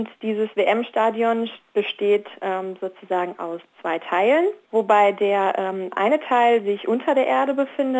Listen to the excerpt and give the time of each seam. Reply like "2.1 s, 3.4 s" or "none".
none